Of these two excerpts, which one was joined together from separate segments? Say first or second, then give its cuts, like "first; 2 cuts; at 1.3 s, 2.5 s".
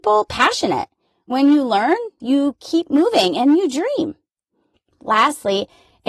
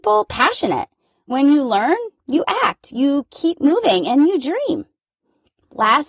first; 1 cut; at 2.2 s